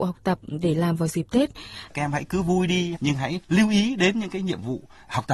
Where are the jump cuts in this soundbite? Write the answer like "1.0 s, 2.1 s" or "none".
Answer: 1.9 s, 2.9 s